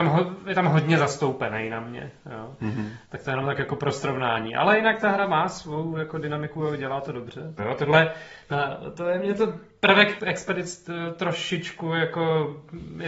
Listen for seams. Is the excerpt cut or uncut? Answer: cut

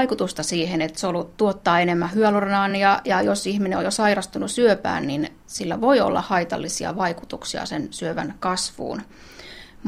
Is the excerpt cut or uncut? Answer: uncut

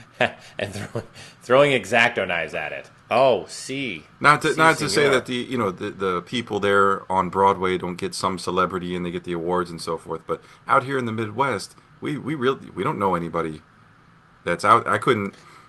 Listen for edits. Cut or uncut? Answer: cut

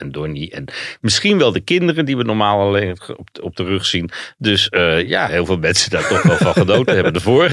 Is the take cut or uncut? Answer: cut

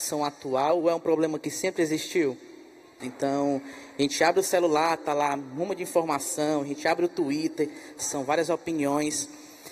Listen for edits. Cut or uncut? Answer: cut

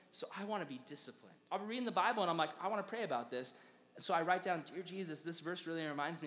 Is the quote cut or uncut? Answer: cut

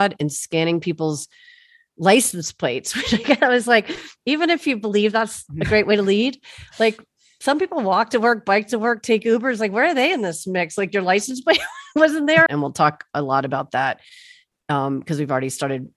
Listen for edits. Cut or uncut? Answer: cut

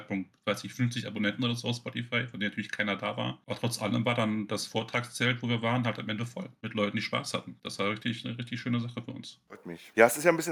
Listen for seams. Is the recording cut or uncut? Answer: uncut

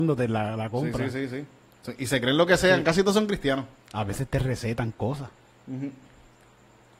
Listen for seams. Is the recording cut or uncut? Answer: uncut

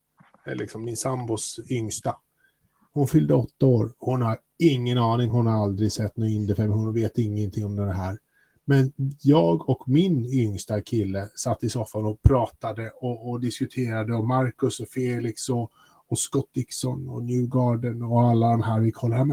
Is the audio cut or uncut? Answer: uncut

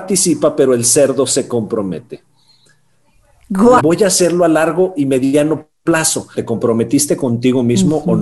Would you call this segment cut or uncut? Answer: cut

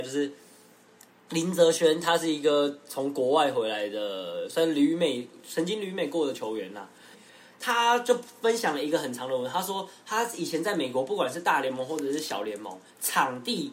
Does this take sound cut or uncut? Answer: cut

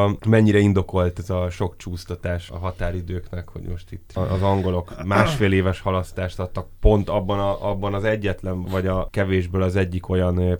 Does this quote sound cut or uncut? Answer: cut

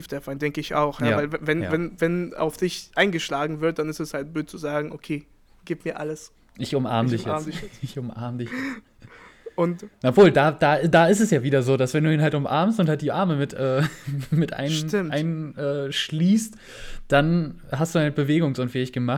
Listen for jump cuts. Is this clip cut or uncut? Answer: uncut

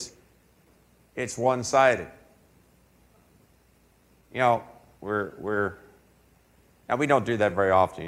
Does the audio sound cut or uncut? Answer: cut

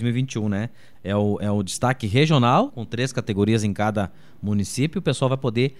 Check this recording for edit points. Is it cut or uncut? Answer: cut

